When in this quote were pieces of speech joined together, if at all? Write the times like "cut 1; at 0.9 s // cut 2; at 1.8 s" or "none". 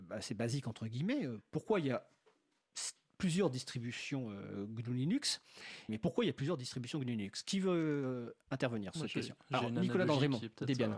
cut 1; at 5.9 s